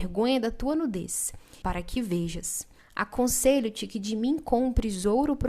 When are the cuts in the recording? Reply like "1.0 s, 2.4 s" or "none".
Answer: 1.6 s, 2.8 s